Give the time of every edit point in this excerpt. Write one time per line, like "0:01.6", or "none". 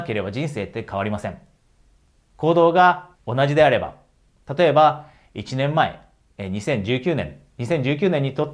0:03.1